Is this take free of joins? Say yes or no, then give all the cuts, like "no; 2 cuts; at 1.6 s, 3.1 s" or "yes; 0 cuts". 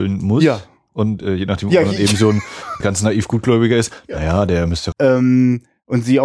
no; 2 cuts; at 2.8 s, 4.9 s